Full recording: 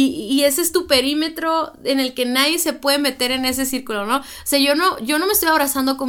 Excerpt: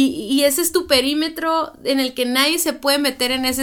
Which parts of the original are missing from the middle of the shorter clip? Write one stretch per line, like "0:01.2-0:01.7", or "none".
none